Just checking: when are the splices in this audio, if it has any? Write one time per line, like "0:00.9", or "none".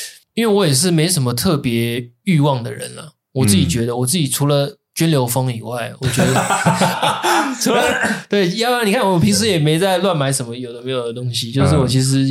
0:06.9